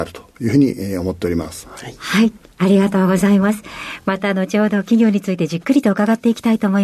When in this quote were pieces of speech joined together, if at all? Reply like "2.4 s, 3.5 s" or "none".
none